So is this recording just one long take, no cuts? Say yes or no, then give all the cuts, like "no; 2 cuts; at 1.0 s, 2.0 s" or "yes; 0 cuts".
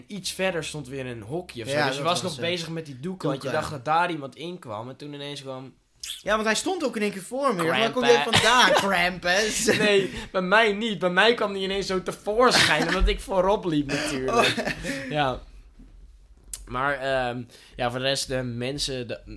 yes; 0 cuts